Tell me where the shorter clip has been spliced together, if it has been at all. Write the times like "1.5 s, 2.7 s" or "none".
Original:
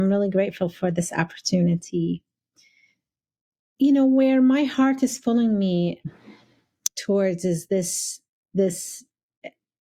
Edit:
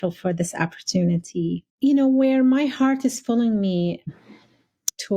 1.7 s

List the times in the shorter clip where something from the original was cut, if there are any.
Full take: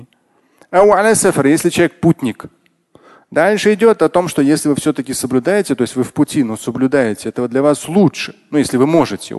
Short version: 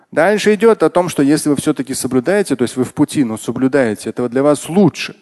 none

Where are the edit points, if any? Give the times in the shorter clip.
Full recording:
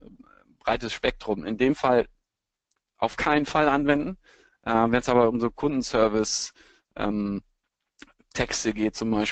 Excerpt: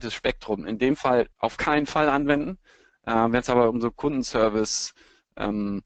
1.3 s

